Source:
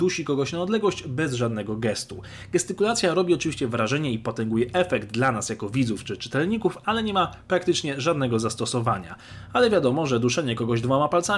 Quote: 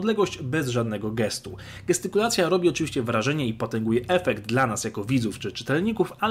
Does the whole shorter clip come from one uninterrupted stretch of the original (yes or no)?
yes